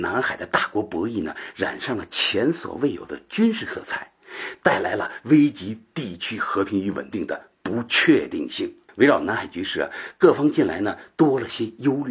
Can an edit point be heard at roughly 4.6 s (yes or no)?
no